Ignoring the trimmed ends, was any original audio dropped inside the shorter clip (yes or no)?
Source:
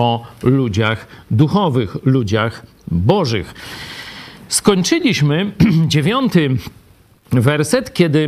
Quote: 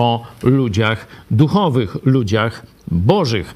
no